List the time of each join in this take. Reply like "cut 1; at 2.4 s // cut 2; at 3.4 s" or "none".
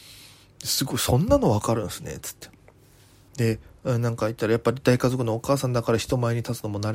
cut 1; at 3.3 s